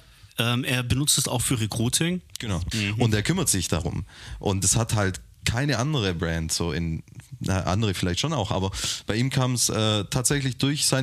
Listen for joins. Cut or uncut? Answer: cut